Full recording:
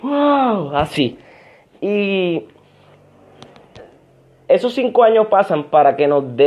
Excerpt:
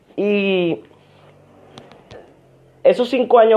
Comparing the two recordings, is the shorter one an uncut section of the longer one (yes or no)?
yes